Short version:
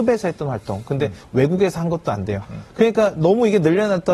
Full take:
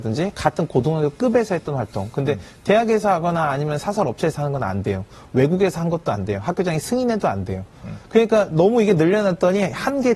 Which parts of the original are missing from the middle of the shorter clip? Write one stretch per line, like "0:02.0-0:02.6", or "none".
0:02.5-0:05.2
0:06.4-0:07.8